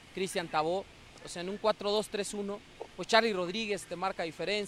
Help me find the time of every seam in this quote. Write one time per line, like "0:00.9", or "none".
0:01.2